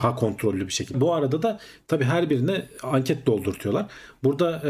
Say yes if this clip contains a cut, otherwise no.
yes